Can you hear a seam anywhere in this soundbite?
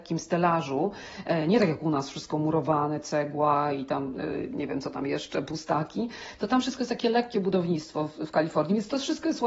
no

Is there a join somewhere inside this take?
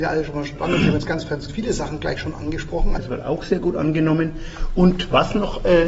yes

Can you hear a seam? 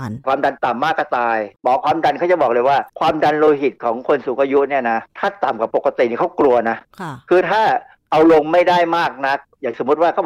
yes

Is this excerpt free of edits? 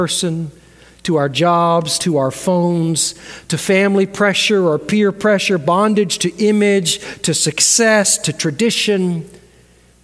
yes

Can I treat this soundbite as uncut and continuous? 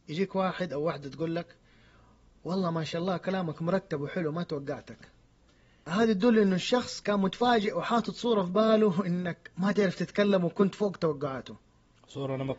yes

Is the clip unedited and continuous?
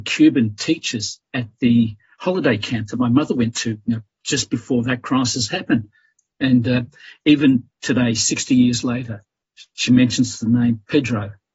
yes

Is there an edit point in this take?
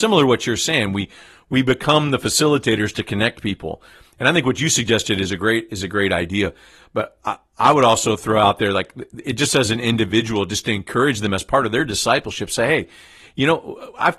no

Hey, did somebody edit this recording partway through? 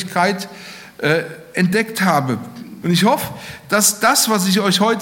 yes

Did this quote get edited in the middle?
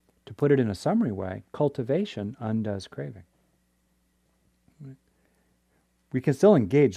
yes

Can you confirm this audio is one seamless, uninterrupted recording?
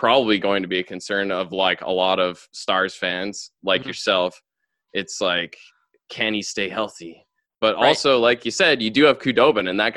yes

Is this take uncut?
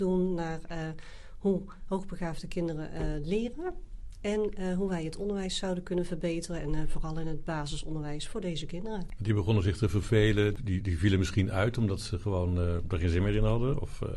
no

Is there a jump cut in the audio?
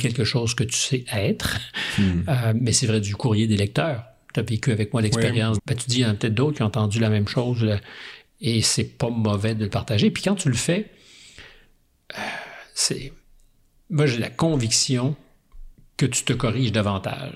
yes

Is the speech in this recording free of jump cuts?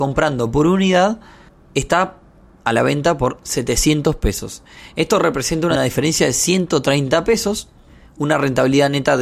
yes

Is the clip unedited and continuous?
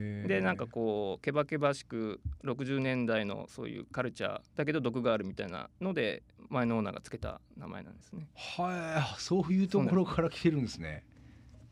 no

